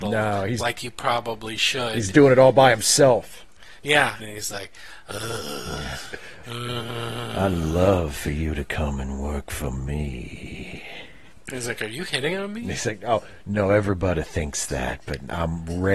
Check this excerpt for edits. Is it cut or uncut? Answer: cut